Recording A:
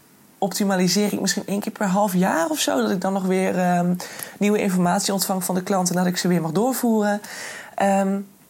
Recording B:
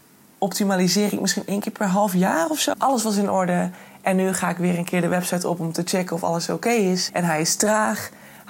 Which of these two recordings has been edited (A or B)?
B